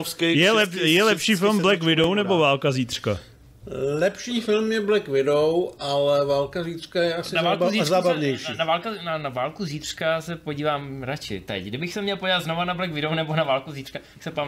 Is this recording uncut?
yes; 0 cuts

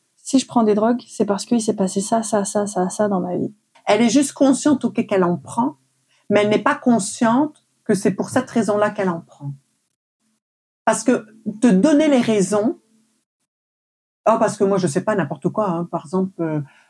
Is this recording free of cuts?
no; 1 cut; at 3.7 s

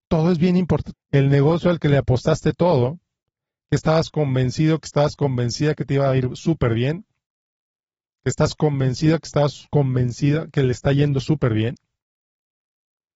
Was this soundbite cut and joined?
yes; 1 cut; at 0.9 s

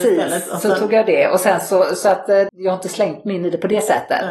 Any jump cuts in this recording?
yes; 1 cut; at 2.5 s

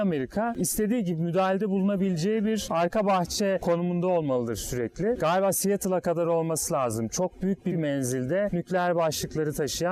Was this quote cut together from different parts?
yes; 1 cut; at 5.2 s

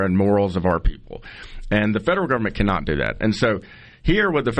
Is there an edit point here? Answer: no; 0 cuts

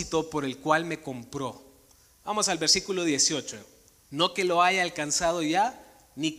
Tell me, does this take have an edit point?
yes; 2 cuts; at 2.1 s, 4.0 s

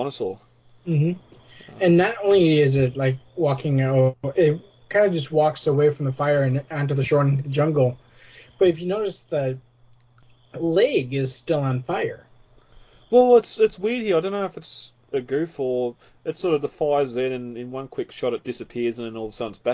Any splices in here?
no; 0 cuts

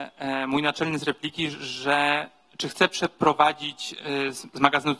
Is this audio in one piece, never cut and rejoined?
yes; 0 cuts

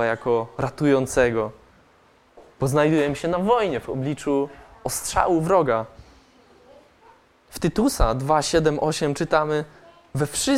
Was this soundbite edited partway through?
no; 0 cuts

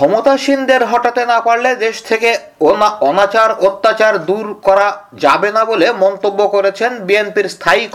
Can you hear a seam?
no; 0 cuts

